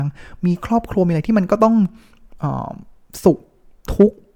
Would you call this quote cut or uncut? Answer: uncut